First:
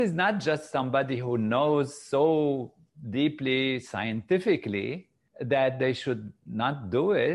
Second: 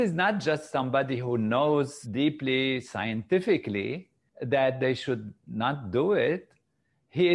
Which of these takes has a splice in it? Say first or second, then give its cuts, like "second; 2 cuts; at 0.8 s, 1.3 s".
second; 1 cut; at 2.0 s